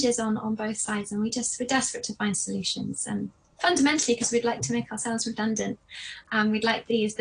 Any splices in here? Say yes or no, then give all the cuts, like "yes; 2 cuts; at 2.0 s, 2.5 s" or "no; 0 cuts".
no; 0 cuts